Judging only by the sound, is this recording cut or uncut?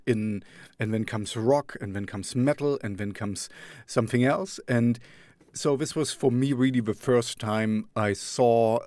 uncut